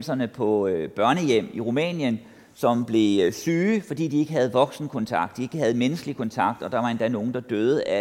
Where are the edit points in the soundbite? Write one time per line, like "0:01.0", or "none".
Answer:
none